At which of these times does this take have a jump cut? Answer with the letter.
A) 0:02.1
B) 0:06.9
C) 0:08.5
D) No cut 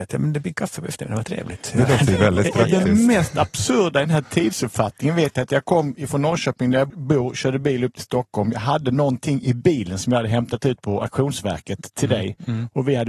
B